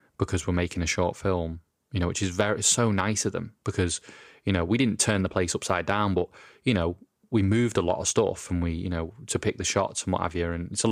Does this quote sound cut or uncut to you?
uncut